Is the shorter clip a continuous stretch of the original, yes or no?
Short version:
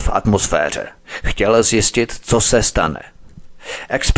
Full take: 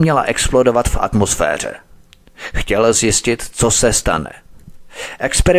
no